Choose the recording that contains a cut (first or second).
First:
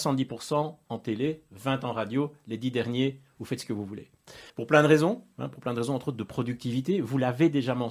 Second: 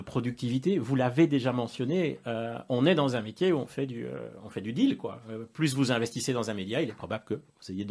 first